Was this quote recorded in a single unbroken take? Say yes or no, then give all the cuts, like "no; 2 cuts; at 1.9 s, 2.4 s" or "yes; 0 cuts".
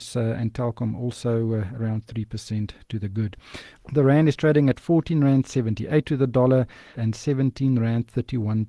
no; 2 cuts; at 3.7 s, 6.9 s